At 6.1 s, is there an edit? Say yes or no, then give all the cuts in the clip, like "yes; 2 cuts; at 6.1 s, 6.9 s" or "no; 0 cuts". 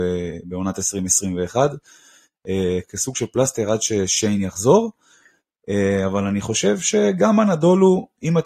no; 1 cut; at 2.8 s